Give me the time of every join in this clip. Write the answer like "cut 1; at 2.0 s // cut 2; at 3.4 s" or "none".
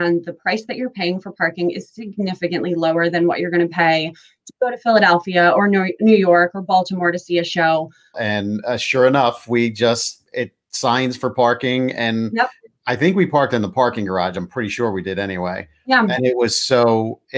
cut 1; at 8.1 s